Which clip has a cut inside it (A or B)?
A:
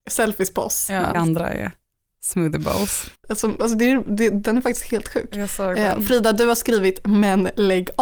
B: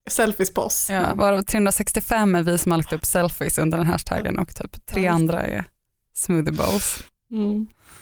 A